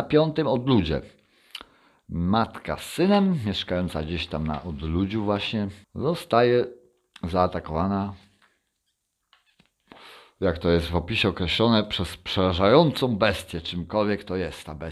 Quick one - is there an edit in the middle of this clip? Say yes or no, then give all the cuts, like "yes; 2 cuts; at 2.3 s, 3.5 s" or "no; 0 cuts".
yes; 1 cut; at 5.8 s